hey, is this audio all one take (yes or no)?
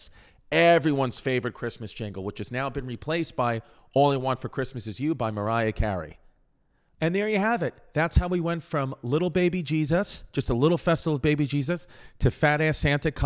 yes